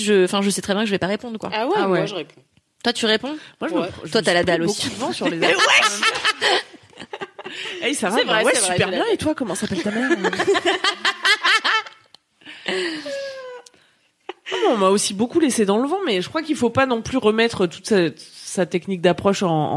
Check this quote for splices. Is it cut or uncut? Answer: uncut